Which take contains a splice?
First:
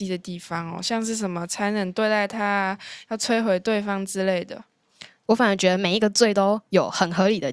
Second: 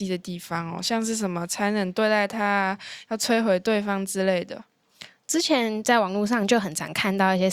first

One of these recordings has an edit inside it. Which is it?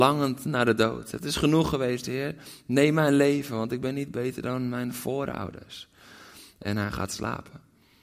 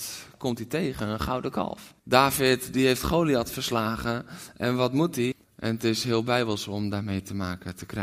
second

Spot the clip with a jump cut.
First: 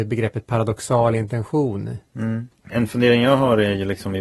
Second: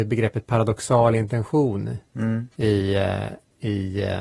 first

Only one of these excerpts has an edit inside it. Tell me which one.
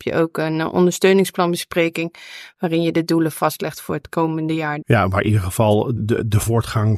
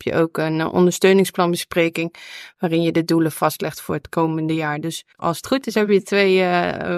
first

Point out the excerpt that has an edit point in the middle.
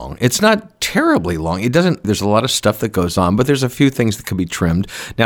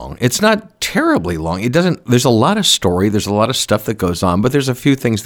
first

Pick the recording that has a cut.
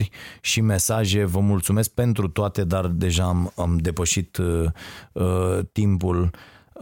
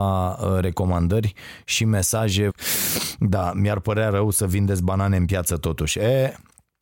second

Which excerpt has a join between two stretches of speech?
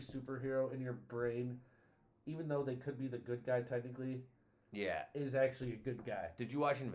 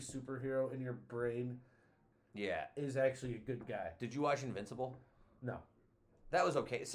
second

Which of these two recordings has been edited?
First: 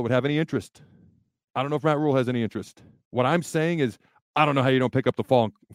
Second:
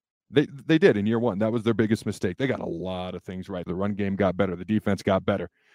second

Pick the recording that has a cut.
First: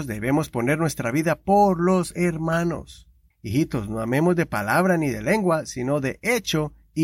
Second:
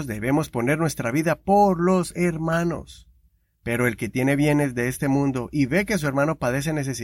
first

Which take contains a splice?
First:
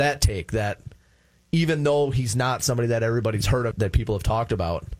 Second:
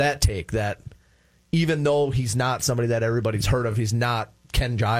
first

